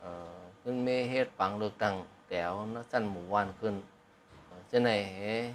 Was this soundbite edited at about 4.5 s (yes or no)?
yes